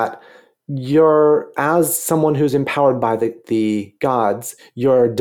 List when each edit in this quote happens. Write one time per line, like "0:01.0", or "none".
none